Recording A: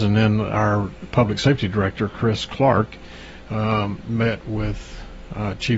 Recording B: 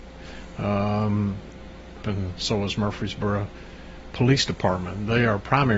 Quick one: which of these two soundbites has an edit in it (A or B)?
B